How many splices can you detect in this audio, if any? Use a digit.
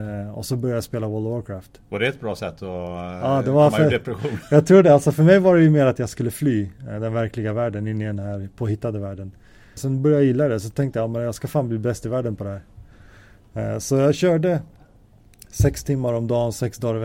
1